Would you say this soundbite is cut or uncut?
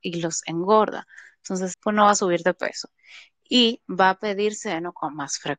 cut